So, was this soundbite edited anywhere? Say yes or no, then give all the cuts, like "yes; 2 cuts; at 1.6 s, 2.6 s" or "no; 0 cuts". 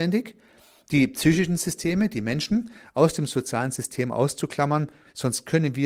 no; 0 cuts